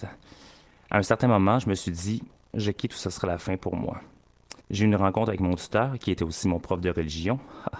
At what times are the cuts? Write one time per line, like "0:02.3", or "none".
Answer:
0:04.6